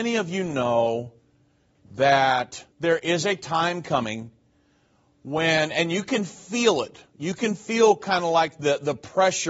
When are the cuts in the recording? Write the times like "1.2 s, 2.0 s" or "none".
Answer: 2.7 s